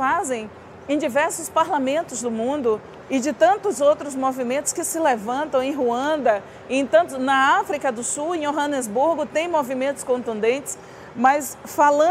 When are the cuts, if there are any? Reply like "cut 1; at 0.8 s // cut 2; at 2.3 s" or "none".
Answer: cut 1; at 3.0 s